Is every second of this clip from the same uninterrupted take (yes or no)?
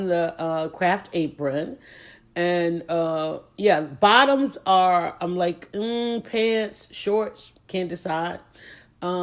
no